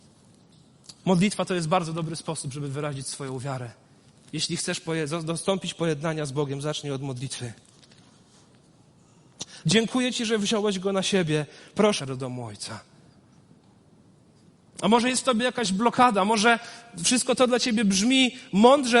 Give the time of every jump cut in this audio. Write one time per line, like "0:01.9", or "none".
0:09.6
0:12.0